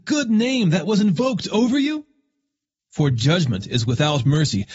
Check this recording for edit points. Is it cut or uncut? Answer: cut